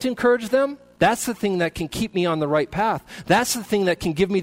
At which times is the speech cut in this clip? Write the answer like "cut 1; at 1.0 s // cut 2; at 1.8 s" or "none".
cut 1; at 1.0 s